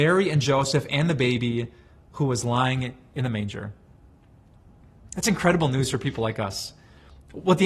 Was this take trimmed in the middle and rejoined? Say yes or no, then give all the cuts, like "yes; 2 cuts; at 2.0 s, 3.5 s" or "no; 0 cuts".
no; 0 cuts